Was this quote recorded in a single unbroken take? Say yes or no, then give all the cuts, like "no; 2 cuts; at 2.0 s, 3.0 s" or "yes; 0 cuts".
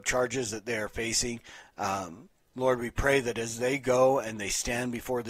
yes; 0 cuts